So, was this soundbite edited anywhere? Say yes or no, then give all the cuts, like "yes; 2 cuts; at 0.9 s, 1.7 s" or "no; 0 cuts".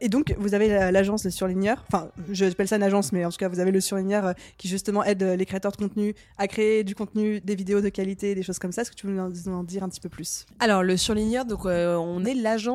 no; 0 cuts